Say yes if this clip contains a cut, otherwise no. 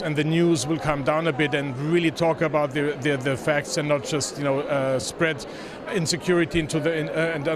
no